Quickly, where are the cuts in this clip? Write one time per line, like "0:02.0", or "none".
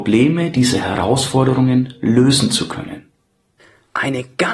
none